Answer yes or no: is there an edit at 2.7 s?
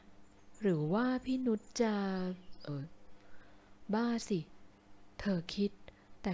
yes